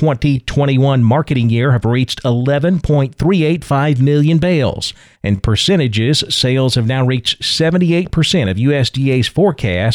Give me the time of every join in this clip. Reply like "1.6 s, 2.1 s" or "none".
5.1 s